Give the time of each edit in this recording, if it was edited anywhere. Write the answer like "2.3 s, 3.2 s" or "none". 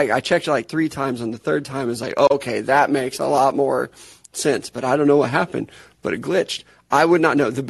none